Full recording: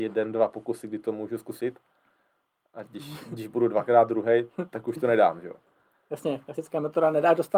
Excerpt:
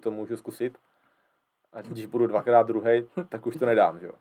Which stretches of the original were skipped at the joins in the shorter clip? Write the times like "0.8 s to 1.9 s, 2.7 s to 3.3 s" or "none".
2.9 s to 3.3 s